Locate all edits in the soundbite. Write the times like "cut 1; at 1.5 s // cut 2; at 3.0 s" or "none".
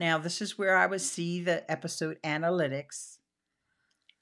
none

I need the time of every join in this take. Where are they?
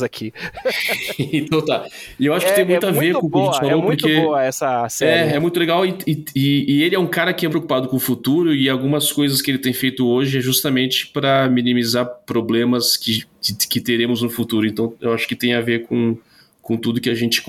cut 1; at 7.5 s

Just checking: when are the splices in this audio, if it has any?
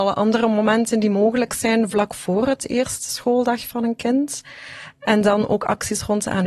none

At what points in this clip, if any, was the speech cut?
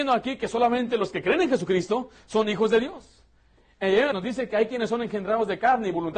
cut 1; at 4.1 s

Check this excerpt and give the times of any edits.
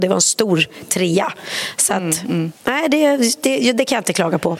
none

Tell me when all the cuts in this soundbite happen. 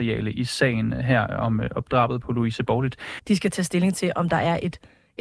cut 1; at 3.2 s

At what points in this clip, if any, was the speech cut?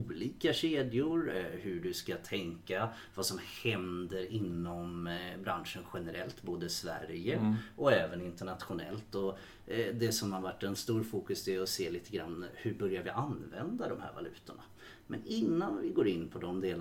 none

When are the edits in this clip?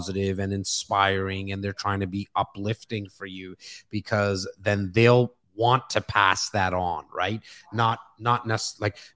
none

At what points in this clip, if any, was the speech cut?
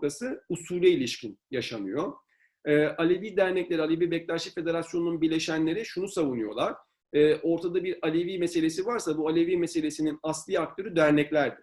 none

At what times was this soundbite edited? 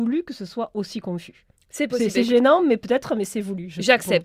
none

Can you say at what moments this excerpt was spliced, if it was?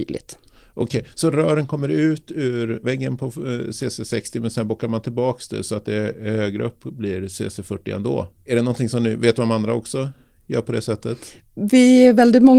cut 1; at 2.8 s // cut 2; at 8.3 s

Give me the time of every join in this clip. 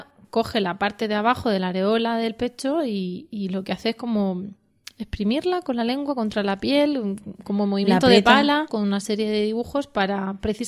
cut 1; at 8.7 s

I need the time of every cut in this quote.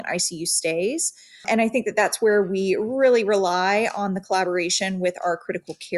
none

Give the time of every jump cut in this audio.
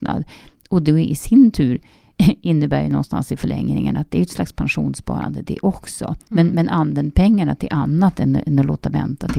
none

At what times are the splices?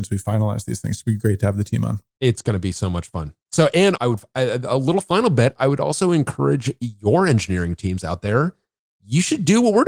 cut 1; at 4.0 s

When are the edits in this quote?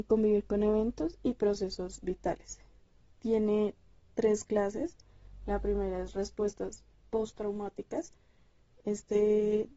cut 1; at 8.7 s

